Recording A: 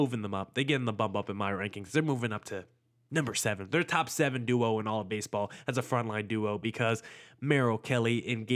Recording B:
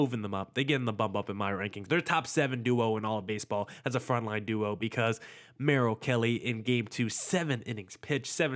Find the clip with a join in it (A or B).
B